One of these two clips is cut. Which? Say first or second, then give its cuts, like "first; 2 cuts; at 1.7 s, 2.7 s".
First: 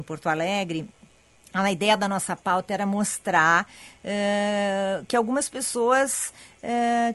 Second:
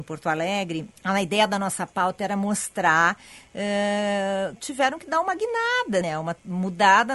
second; 3 cuts; at 1.0 s, 4.6 s, 6.0 s